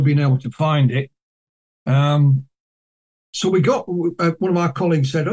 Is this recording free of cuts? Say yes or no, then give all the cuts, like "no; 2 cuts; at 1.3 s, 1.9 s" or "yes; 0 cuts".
no; 1 cut; at 4.4 s